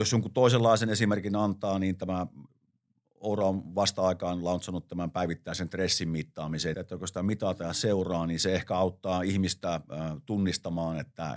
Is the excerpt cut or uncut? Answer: cut